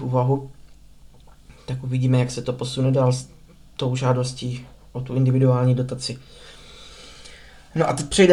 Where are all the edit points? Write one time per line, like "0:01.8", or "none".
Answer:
none